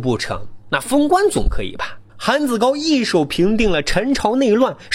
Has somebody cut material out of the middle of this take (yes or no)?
yes